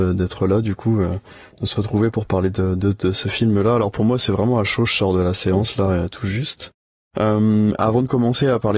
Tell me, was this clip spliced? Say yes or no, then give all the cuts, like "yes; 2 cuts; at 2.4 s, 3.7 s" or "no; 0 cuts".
no; 0 cuts